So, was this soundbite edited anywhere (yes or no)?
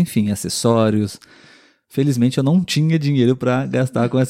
no